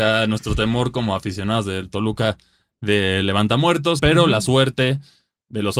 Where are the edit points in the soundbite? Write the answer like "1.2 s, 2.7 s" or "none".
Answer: 4.0 s